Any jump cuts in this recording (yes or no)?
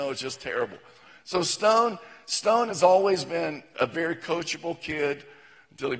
no